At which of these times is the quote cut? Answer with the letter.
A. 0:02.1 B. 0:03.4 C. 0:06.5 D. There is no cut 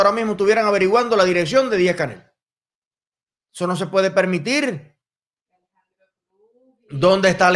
B